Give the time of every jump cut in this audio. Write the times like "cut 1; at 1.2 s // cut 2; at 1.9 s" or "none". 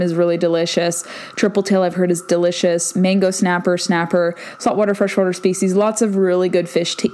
none